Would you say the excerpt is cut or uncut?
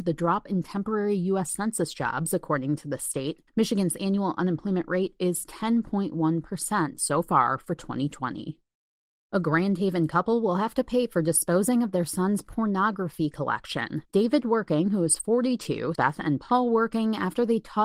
cut